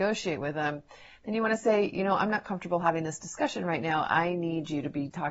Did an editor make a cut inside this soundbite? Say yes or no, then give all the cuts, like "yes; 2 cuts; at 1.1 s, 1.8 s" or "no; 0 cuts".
no; 0 cuts